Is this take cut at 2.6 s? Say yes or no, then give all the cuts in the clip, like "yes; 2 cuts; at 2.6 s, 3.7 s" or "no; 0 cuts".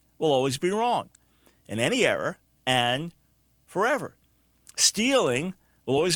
yes; 1 cut; at 2.6 s